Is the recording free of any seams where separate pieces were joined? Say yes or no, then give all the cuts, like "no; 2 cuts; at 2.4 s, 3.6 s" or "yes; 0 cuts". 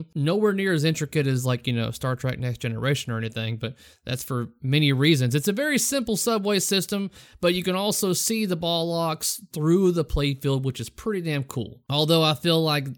yes; 0 cuts